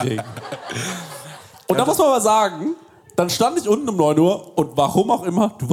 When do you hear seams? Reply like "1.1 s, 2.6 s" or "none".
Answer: none